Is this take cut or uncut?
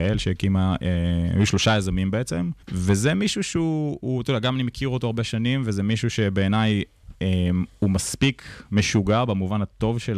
cut